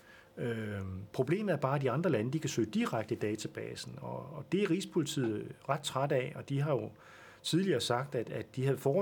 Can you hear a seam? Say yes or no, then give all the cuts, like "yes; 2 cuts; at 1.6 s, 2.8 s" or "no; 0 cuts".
no; 0 cuts